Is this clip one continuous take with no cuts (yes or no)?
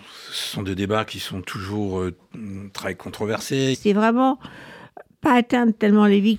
no